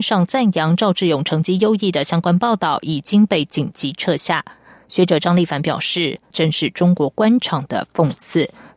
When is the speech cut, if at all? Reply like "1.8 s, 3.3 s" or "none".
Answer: 6.3 s